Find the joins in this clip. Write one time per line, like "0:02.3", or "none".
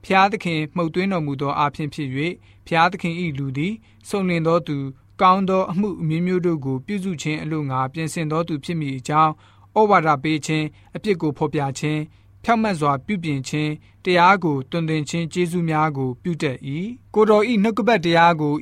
0:17.0